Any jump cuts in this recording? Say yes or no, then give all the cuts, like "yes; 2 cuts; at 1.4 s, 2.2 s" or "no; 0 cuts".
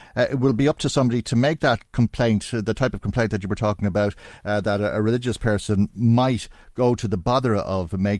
no; 0 cuts